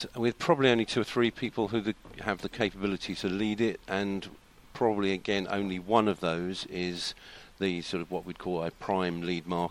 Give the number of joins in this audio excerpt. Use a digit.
0